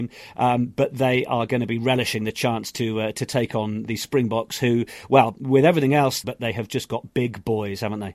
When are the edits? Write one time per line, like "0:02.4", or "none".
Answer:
0:03.9
0:06.2